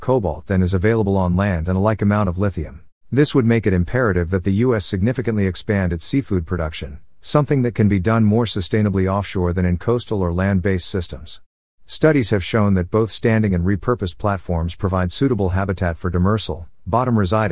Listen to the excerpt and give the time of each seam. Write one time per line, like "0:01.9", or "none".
0:03.0